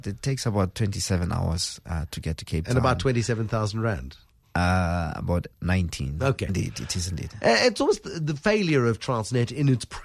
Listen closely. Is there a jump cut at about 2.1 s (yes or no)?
no